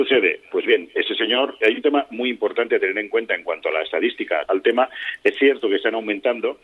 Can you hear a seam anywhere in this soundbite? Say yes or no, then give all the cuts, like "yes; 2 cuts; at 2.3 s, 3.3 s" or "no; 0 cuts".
yes; 2 cuts; at 1.6 s, 4.4 s